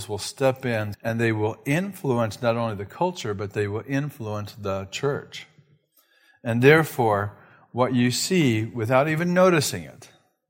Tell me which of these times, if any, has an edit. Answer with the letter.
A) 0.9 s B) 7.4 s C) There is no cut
A